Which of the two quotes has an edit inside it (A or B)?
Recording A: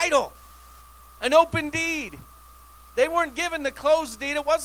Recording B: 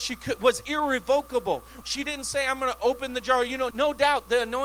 B